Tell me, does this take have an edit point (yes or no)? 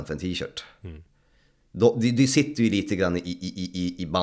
no